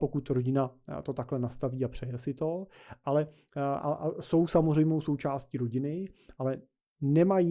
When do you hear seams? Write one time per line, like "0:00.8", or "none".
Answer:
none